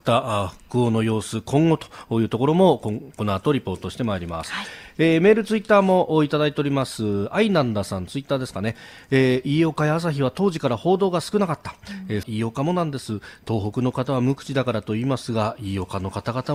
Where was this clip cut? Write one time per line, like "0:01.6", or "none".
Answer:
0:12.2

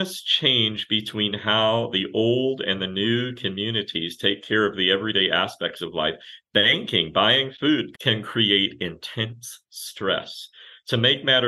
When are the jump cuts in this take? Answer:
0:07.9

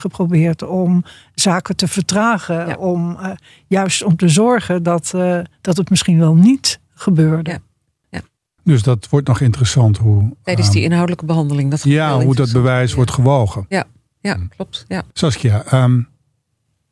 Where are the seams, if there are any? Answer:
0:15.1

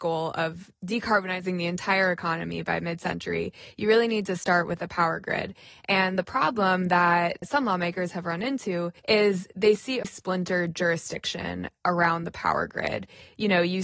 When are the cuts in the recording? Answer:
0:09.0
0:10.0

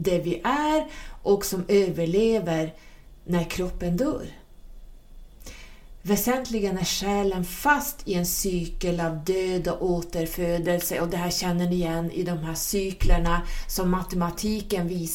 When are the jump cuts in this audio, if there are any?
none

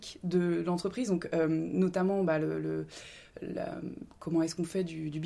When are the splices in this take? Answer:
none

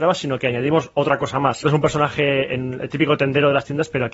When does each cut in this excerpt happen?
0:01.6

